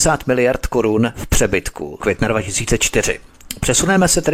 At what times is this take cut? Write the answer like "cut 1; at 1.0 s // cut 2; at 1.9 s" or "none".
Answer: cut 1; at 2.0 s